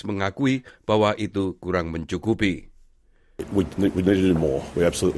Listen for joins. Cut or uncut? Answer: uncut